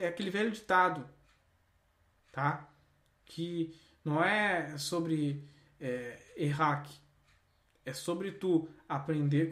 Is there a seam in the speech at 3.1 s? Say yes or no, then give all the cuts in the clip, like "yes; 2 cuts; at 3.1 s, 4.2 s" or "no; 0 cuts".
no; 0 cuts